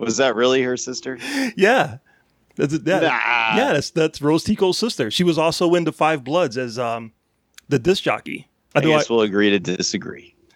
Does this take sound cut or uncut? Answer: cut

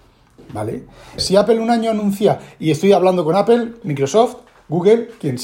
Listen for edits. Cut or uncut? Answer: cut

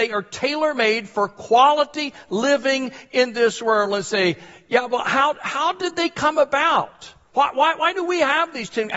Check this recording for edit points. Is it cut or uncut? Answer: cut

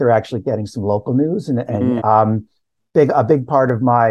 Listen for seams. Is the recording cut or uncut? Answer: cut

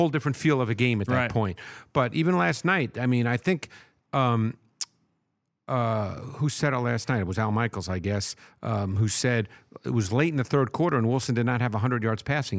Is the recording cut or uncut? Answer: uncut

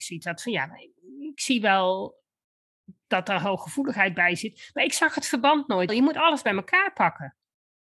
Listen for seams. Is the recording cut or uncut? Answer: cut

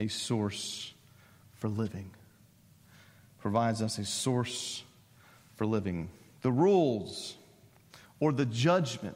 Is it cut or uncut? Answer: cut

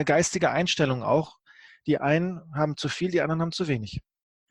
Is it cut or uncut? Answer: cut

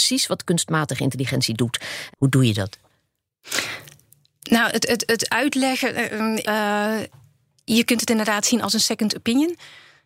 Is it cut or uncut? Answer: cut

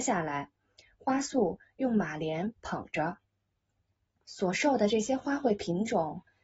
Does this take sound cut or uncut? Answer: cut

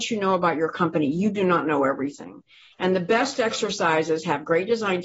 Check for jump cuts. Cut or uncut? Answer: uncut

